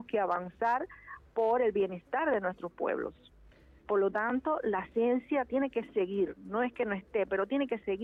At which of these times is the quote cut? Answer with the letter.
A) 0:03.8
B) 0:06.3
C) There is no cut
A